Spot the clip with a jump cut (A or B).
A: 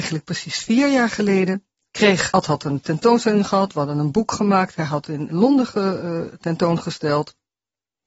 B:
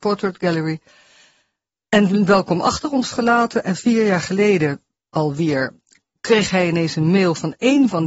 A